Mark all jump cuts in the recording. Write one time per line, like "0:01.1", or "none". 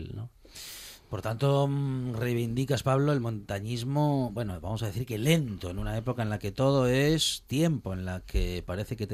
none